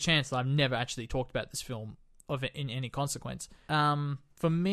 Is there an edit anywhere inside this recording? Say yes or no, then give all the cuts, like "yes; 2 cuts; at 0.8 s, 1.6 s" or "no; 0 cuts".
yes; 1 cut; at 3.7 s